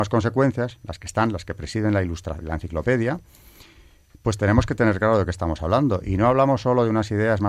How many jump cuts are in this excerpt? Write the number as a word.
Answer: one